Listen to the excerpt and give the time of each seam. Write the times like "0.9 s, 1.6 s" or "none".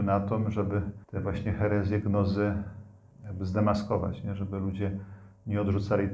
1.0 s

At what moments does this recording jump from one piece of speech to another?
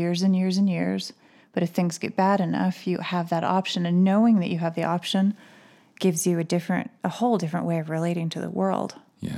none

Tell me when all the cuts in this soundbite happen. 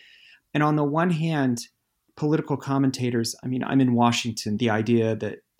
4.6 s

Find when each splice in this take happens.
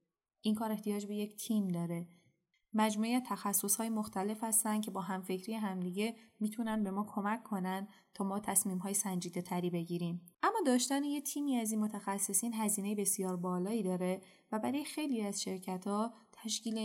10.3 s

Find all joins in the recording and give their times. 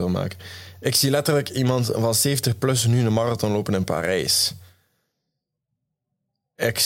none

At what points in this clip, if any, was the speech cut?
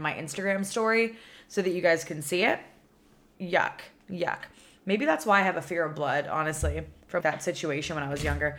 3.4 s, 7.2 s

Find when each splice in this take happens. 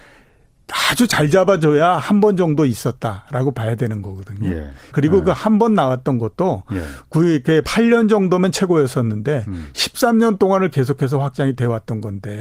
4.9 s, 7.6 s

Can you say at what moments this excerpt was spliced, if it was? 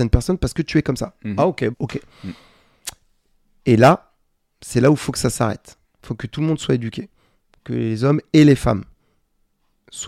1.7 s

